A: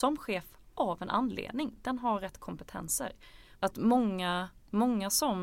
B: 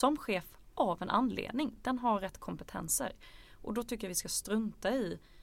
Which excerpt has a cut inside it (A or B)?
A